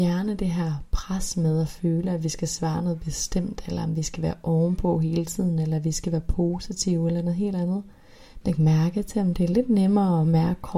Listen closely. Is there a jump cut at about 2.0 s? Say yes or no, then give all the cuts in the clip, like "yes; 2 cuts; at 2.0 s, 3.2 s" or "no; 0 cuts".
no; 1 cut; at 8.4 s